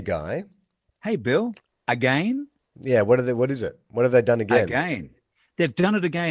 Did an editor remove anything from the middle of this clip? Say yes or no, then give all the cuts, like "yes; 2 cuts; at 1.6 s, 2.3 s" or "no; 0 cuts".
yes; 1 cut; at 1.7 s